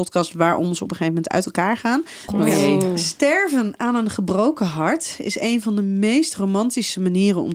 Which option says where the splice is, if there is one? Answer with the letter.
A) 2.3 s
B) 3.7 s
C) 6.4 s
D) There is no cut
A